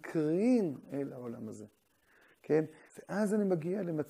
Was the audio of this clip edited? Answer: yes; 1 cut; at 2.9 s

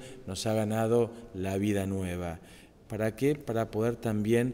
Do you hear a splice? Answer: yes; 1 cut; at 2.8 s

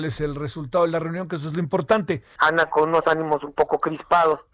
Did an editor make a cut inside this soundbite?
yes; 1 cut; at 2.4 s

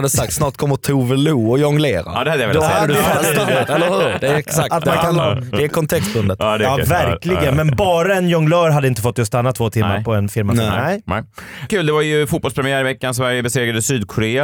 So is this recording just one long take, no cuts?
yes; 0 cuts

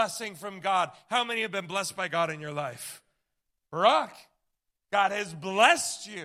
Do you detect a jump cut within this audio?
no; 0 cuts

